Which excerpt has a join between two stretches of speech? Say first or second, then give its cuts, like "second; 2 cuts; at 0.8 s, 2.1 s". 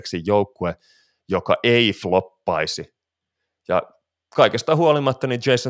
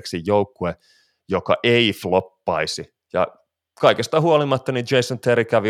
second; 1 cut; at 3.0 s